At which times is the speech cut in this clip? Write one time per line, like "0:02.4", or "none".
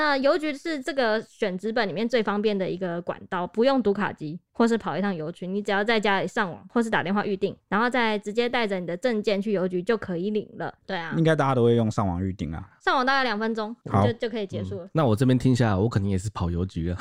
0:10.8